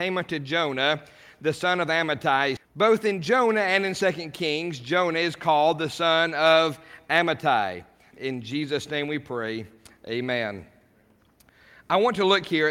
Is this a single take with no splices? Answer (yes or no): no